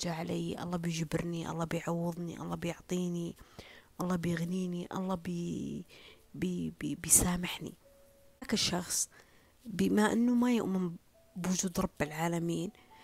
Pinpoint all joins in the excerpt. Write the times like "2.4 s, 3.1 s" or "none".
none